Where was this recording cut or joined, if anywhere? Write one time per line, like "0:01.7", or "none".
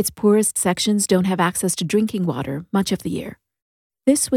none